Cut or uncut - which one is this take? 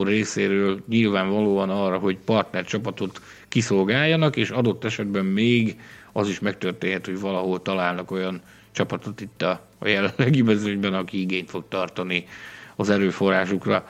uncut